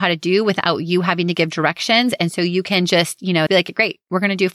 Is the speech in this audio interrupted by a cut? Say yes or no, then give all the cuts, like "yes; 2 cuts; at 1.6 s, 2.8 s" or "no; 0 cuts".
yes; 1 cut; at 3.5 s